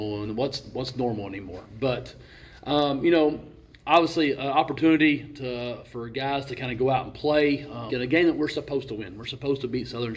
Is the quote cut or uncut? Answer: cut